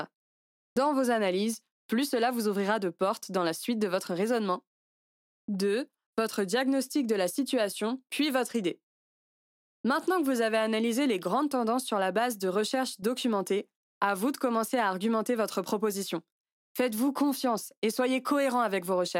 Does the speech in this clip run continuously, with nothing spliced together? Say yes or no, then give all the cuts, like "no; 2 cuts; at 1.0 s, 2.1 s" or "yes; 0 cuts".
no; 1 cut; at 1.7 s